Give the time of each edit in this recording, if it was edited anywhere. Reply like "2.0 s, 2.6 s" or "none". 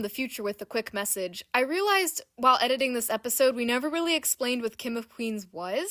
none